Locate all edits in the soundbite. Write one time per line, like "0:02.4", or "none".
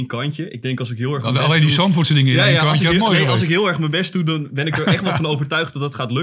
none